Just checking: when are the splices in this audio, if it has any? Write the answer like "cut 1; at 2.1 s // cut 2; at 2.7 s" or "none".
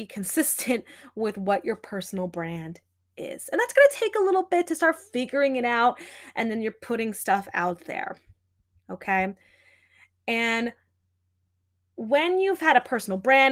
none